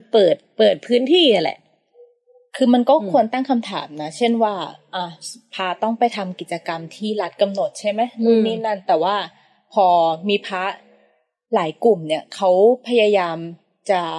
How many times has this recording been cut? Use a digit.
0